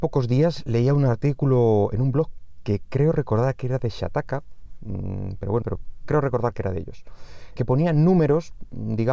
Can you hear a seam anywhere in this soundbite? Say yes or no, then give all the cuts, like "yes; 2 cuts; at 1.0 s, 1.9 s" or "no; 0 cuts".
yes; 2 cuts; at 5.6 s, 7.6 s